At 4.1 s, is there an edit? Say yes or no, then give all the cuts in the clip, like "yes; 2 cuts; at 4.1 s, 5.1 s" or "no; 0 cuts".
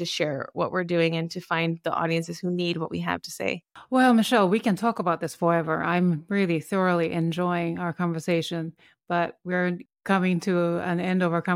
no; 0 cuts